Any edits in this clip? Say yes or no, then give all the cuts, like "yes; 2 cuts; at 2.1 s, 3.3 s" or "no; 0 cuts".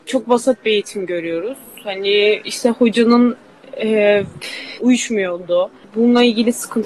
yes; 1 cut; at 4.8 s